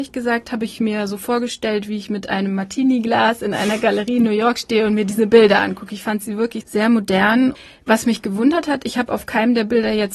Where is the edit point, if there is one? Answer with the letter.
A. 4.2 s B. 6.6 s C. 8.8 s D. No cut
B